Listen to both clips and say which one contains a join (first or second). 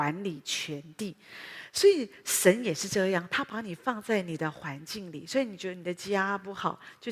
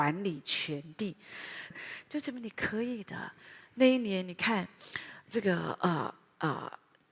second